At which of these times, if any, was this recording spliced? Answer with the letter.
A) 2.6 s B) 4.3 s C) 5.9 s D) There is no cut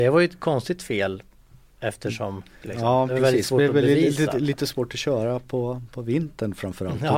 A